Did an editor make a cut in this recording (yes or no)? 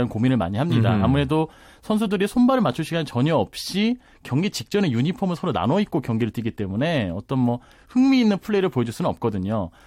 no